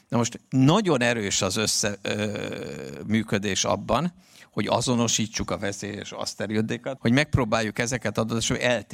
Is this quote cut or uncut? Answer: cut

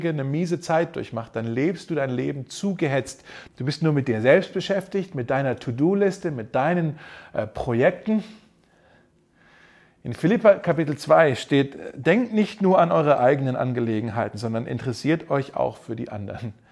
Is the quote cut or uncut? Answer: cut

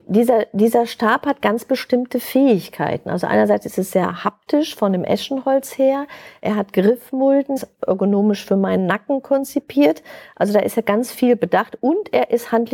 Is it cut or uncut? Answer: cut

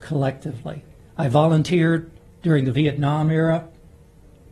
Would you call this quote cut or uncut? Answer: cut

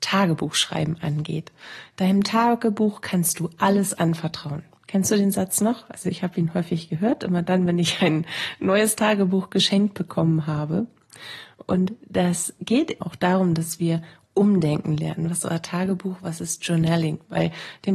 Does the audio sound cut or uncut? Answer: cut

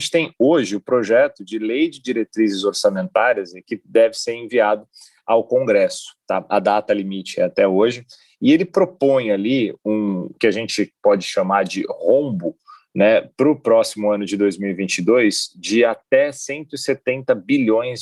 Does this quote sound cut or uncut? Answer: cut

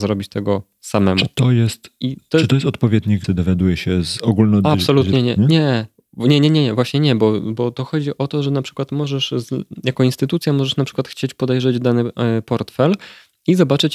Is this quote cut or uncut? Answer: uncut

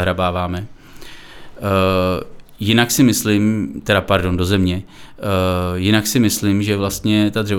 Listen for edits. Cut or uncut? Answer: uncut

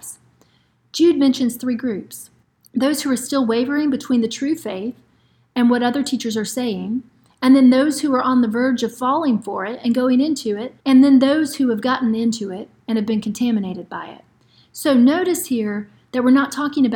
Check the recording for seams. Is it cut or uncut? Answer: cut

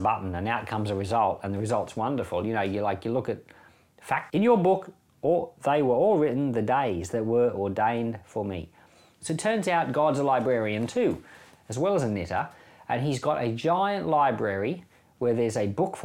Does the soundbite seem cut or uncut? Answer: cut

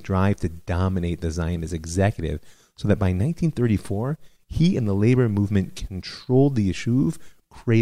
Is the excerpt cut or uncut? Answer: uncut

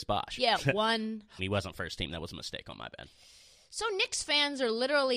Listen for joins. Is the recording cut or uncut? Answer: cut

